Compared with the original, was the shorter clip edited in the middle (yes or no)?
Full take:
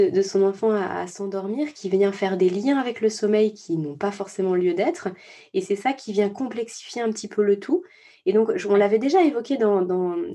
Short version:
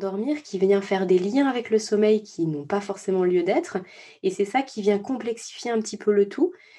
no